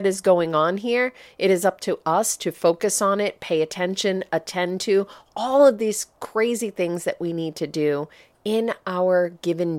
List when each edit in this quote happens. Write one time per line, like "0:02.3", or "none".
0:04.3

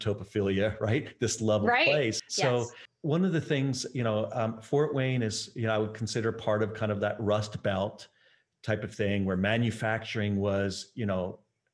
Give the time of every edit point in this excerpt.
0:02.3

